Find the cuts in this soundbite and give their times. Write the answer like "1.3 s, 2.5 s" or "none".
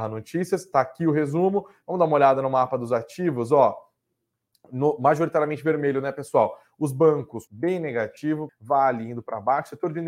7.5 s, 8.5 s